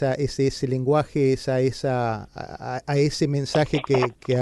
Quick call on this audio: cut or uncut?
uncut